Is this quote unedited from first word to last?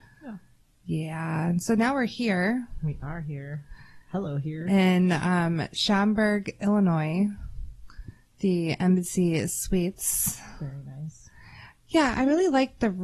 yes; 0 cuts

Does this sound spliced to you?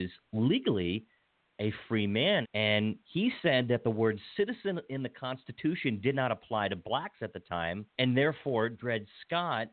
yes; 2 cuts; at 2.4 s, 7.9 s

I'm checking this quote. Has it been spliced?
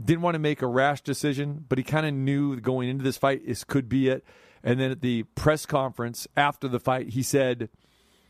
no; 0 cuts

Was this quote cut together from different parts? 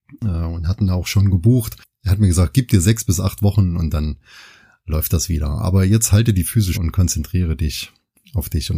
yes; 1 cut; at 6.7 s

